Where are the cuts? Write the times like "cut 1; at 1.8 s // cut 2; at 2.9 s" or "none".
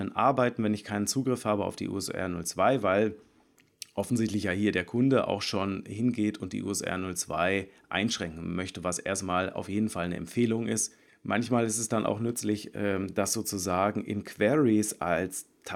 cut 1; at 11.1 s